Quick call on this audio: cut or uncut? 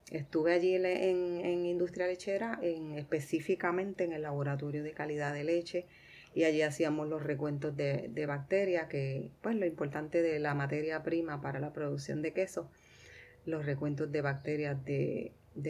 uncut